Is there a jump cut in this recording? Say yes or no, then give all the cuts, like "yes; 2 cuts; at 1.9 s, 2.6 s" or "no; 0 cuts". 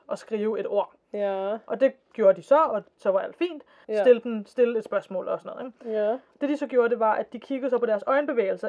yes; 1 cut; at 3.8 s